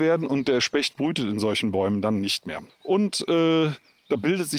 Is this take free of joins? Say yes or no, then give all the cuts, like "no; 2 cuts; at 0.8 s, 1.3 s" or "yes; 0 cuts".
no; 1 cut; at 2.7 s